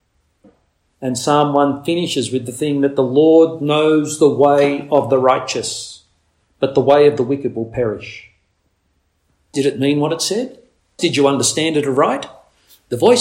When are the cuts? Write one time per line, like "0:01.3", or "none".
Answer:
0:09.5
0:11.0